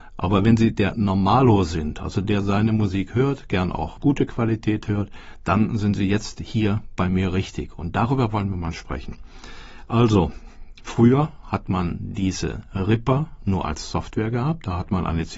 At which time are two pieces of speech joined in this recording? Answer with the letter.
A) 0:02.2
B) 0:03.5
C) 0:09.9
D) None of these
A